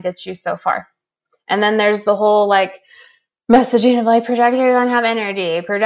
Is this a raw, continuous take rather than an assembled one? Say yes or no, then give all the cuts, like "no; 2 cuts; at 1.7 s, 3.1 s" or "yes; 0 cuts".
yes; 0 cuts